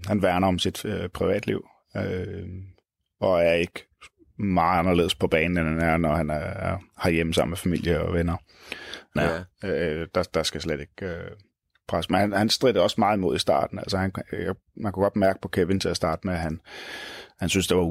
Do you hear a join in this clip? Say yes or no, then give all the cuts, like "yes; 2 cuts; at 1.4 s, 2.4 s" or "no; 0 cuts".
yes; 1 cut; at 9.2 s